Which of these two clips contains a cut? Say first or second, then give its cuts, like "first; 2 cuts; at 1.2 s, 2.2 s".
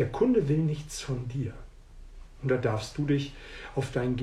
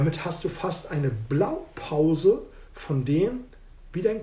first; 1 cut; at 2.3 s